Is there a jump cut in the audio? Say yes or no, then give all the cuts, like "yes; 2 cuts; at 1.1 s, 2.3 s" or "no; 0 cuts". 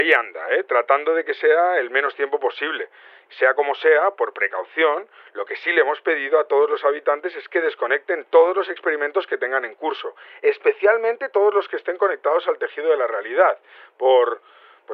yes; 1 cut; at 3.3 s